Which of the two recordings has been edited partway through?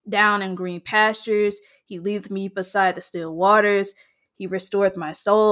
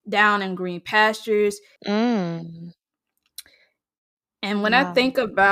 second; 1 cut; at 1.8 s

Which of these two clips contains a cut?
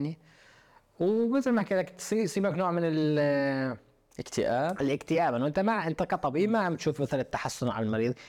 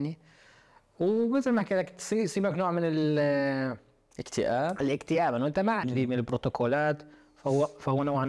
second; 1 cut; at 5.8 s

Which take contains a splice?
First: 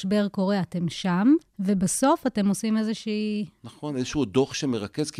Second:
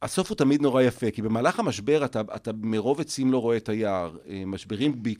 first; 1 cut; at 1.4 s

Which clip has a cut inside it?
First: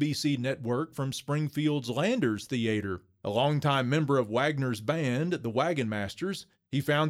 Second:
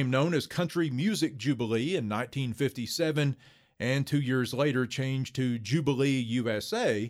first; 1 cut; at 3.2 s

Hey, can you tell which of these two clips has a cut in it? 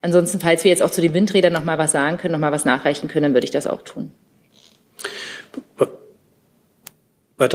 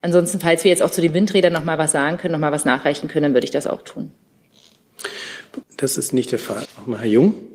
second; 2 cuts; at 5.6 s, 6.7 s

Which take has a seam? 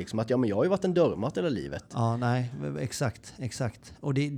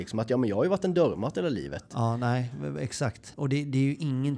second; 1 cut; at 3.3 s

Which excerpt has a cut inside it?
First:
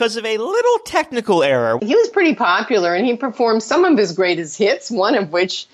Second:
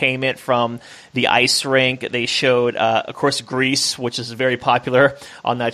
first; 1 cut; at 1.8 s

